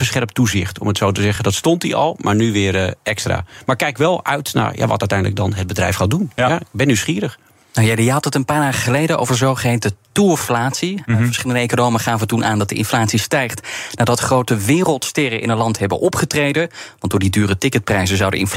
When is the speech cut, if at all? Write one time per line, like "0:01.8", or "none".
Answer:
none